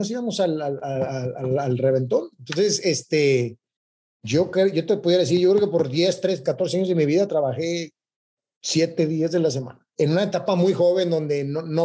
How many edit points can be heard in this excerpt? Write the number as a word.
two